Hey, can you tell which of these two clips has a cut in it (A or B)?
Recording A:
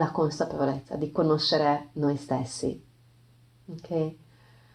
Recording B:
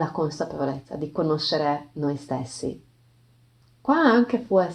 B